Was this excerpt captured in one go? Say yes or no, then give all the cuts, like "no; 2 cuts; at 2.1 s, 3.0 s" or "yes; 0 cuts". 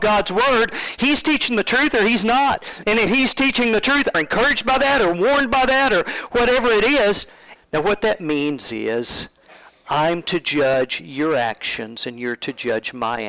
no; 2 cuts; at 4.1 s, 7.6 s